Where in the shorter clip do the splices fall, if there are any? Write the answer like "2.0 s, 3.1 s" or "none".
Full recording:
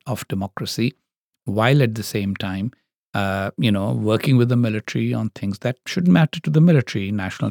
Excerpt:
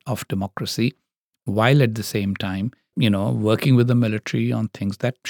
2.9 s